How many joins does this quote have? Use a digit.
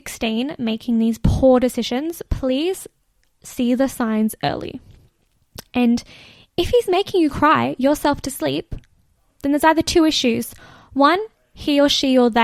0